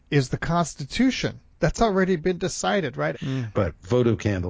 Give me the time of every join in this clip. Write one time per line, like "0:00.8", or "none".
0:03.1